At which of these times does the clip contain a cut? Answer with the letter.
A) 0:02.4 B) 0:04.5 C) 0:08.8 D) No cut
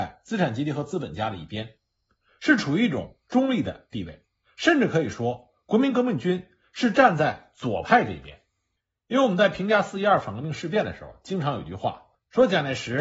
D